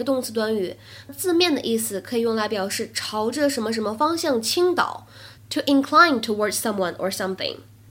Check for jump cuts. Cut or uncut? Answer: cut